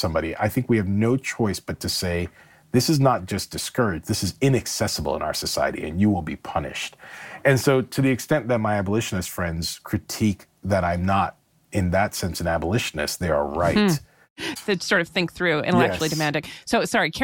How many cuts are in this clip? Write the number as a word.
one